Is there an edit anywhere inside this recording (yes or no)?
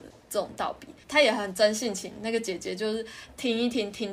no